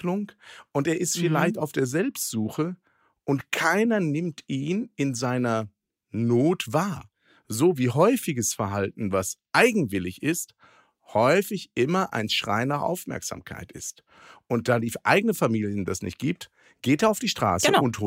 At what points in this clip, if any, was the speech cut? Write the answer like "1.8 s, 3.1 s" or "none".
none